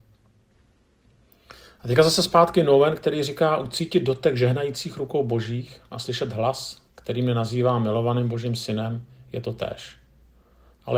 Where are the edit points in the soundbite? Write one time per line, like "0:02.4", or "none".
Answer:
none